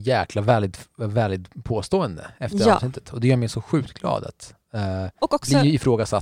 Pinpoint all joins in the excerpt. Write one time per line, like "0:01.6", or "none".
none